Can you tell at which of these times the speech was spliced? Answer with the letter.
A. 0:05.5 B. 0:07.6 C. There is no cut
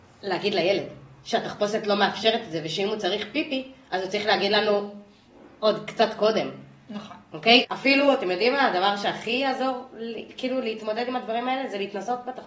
B